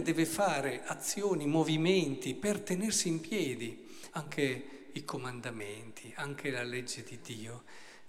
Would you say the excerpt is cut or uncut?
cut